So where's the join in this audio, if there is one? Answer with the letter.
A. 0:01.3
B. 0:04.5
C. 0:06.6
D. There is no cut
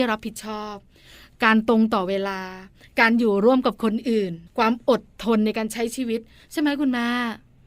B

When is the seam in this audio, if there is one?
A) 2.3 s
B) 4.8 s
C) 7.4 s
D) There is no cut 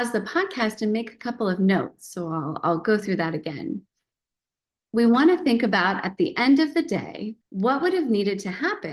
C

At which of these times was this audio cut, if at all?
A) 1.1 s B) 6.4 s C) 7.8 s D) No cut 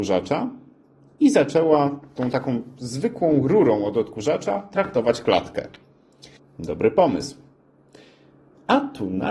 B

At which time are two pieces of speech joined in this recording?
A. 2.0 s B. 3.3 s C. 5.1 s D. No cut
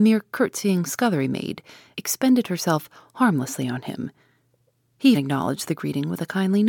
C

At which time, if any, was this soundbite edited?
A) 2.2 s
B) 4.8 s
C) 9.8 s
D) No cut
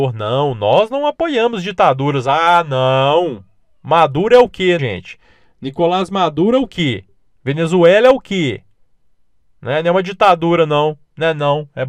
B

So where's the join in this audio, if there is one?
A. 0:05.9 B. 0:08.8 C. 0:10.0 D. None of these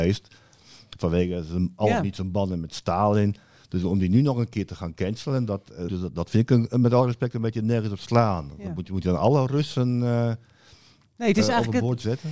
A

